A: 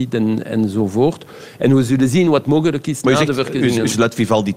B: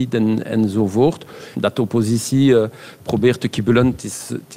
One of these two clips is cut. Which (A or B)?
B